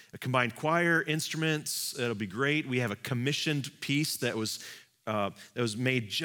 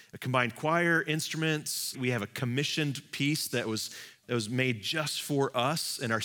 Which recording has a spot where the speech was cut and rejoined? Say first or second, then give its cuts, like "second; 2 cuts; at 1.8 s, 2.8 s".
second; 2 cuts; at 1.9 s, 4.2 s